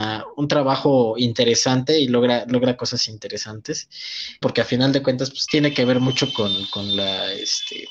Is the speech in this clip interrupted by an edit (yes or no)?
yes